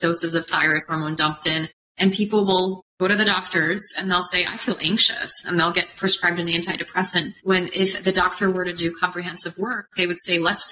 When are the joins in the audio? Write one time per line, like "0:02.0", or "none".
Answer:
none